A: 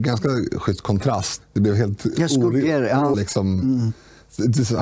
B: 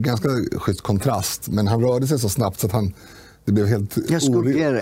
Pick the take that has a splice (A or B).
A